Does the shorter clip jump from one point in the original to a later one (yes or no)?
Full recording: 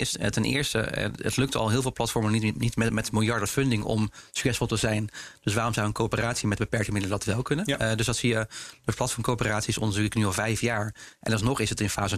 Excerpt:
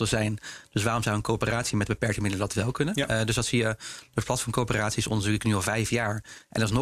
no